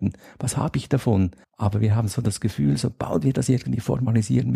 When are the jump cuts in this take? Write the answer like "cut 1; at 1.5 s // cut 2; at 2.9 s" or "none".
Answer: cut 1; at 1.4 s

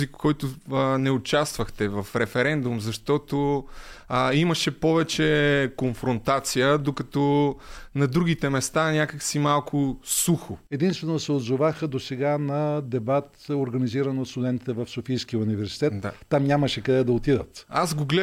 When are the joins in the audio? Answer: cut 1; at 10.7 s

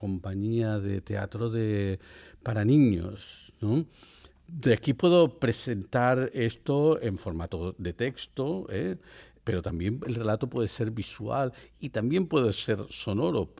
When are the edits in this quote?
none

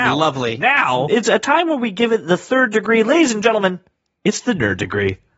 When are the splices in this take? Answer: cut 1; at 1.1 s

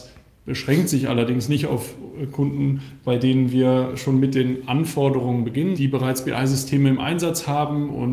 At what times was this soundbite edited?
cut 1; at 5.8 s

